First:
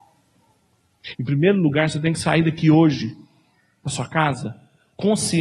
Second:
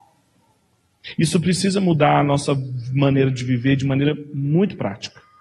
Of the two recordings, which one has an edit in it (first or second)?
first